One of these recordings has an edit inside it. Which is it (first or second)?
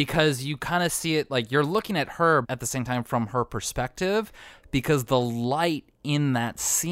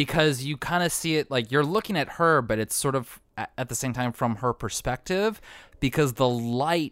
first